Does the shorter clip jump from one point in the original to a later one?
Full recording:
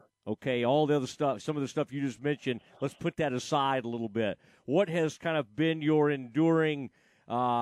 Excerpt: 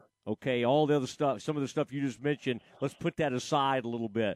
no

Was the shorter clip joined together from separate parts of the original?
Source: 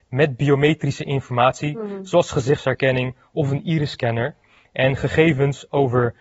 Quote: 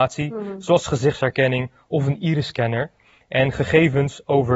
no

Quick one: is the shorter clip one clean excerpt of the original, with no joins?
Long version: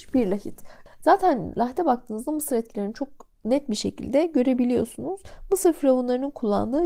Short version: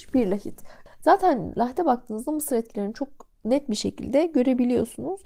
yes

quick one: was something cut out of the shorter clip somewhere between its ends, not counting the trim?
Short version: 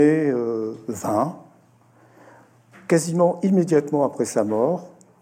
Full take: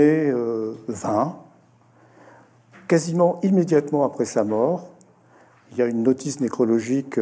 no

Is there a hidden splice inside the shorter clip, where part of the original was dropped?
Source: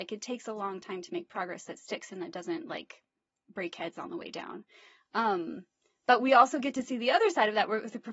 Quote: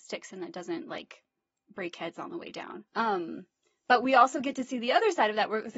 yes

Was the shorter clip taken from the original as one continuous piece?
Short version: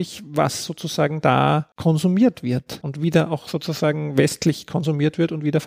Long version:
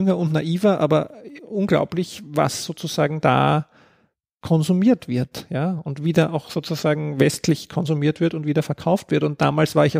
no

